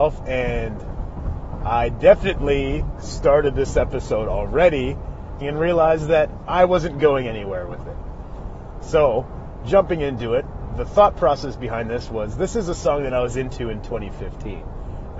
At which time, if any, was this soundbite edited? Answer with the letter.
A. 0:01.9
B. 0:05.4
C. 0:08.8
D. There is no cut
B